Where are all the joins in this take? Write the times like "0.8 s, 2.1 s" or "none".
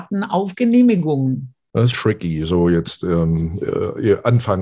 1.9 s